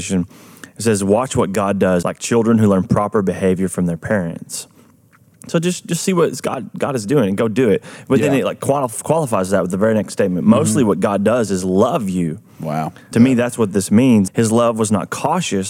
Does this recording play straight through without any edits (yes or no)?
no